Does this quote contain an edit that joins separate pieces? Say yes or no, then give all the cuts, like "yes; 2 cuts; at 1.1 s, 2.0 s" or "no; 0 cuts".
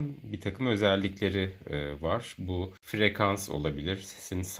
no; 0 cuts